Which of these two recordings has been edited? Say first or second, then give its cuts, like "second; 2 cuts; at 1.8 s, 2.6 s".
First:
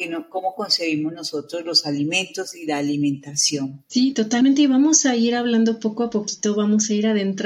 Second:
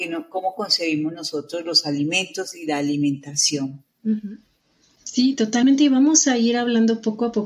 first; 1 cut; at 3.9 s